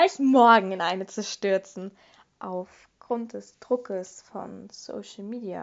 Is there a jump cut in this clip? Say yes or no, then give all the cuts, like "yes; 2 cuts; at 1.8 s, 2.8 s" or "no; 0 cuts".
no; 0 cuts